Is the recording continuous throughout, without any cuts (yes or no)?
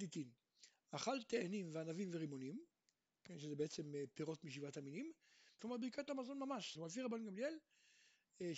no